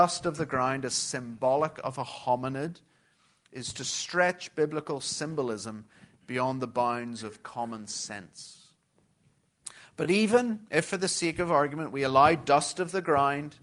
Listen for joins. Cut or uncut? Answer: uncut